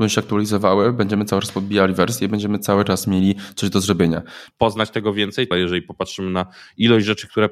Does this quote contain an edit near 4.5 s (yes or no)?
yes